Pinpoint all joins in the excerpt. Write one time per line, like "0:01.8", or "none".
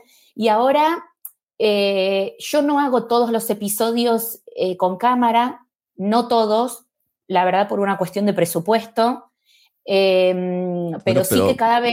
none